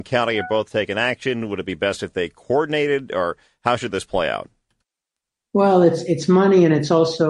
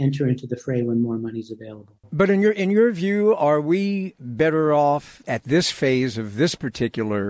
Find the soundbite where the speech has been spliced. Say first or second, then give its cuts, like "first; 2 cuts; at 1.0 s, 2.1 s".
second; 2 cuts; at 2.0 s, 5.2 s